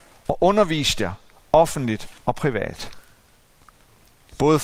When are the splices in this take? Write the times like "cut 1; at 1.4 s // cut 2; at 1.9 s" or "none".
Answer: cut 1; at 2.2 s